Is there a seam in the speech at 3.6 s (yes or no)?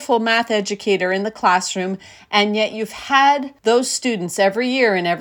yes